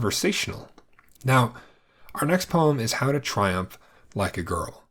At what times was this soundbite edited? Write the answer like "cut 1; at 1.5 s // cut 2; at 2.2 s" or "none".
cut 1; at 1.1 s